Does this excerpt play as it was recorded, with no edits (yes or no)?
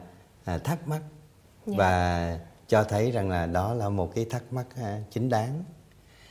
yes